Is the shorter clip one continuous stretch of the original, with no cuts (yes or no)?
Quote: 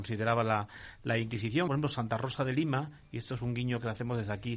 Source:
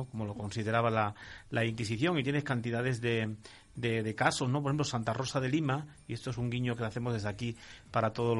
no